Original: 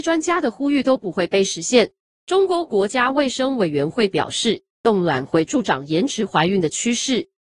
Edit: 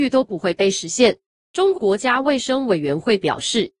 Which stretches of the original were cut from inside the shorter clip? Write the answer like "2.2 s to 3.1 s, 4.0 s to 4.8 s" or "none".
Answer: 2.5 s to 2.6 s